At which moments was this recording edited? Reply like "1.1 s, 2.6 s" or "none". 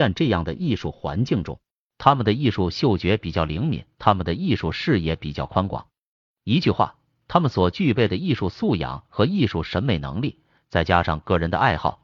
3.9 s